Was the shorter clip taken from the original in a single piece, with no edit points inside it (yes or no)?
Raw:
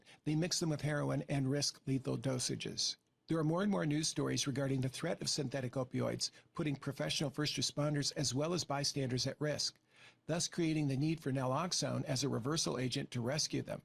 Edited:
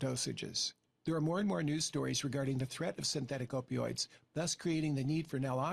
no